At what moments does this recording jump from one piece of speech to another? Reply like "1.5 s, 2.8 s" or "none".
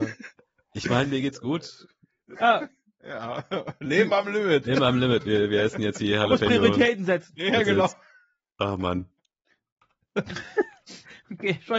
2.4 s